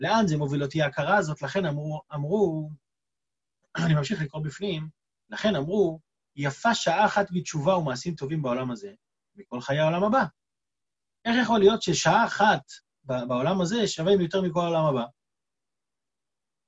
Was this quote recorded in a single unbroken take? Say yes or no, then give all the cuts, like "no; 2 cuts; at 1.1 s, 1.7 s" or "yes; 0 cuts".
yes; 0 cuts